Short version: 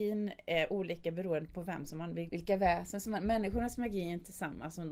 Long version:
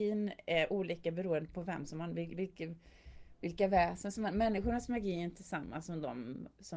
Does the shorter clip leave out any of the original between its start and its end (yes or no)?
yes